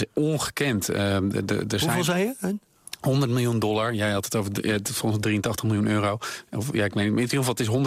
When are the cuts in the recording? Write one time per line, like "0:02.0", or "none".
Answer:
none